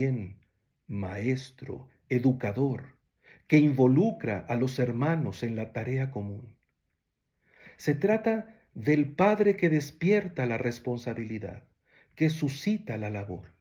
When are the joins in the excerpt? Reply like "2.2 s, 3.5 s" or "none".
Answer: none